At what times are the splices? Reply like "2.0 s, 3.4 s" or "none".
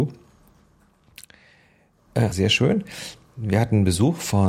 2.3 s